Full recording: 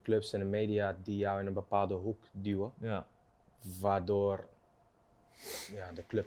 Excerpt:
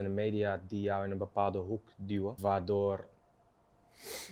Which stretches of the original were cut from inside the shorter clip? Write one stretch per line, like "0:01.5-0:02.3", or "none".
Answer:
0:02.7-0:03.8